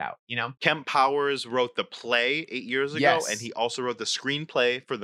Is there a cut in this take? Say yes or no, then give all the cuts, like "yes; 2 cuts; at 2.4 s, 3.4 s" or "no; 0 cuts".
no; 0 cuts